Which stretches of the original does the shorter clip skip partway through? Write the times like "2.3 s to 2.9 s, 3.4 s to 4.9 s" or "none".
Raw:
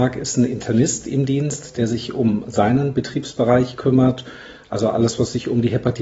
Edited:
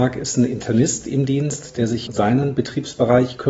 2.1 s to 2.5 s